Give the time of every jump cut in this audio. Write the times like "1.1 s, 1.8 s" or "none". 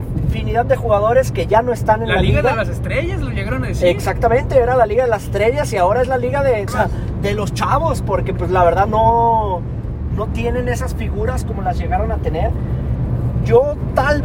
6.7 s, 8.9 s